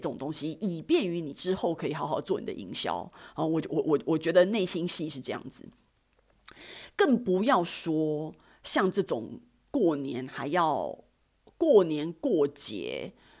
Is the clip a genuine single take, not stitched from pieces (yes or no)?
yes